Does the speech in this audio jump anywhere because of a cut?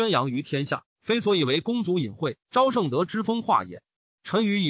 yes; 1 cut; at 2.4 s

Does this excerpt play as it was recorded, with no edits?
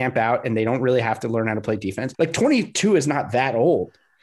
no; 1 cut; at 2.1 s

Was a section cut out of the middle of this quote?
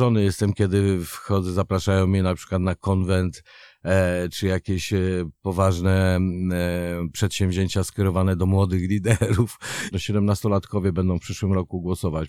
yes; 1 cut; at 9.9 s

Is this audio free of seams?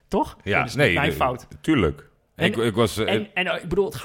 yes; 0 cuts

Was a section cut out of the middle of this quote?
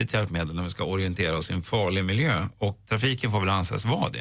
yes; 1 cut; at 2.9 s

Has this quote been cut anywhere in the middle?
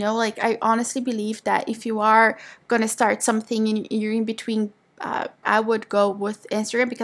yes; 1 cut; at 5.4 s

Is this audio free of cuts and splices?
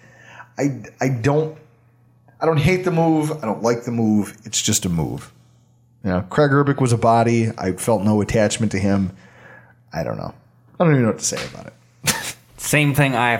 yes; 0 cuts

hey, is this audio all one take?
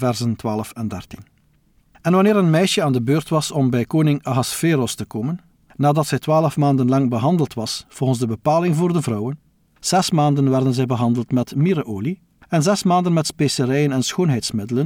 no; 1 cut; at 9.6 s

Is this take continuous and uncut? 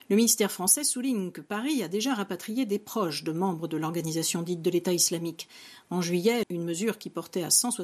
no; 1 cut; at 6.4 s

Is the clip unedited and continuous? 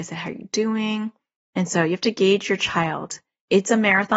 no; 1 cut; at 1.4 s

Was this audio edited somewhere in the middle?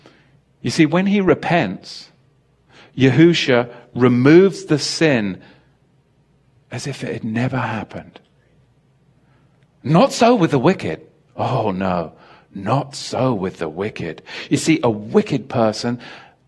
no; 0 cuts

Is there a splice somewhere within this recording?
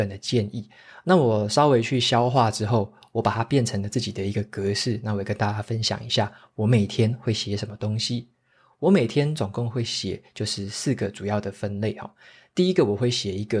no; 0 cuts

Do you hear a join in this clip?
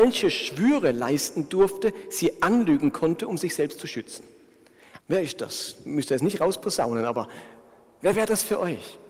yes; 1 cut; at 5.0 s

